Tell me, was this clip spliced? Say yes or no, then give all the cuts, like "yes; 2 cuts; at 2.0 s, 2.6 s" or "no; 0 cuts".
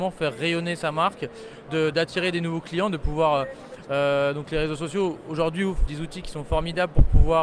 yes; 2 cuts; at 3.9 s, 5.9 s